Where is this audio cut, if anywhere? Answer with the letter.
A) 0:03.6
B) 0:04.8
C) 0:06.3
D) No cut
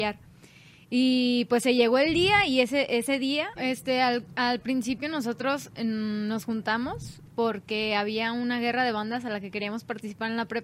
A